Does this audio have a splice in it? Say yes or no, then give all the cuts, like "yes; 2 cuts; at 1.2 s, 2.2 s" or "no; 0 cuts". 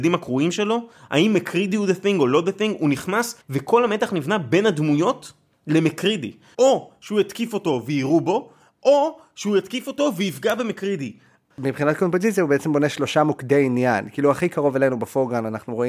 yes; 3 cuts; at 3.4 s, 6.5 s, 11.5 s